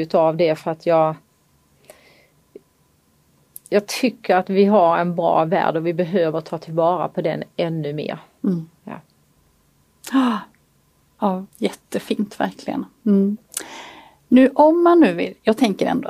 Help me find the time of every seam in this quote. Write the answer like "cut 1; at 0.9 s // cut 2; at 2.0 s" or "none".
cut 1; at 11.5 s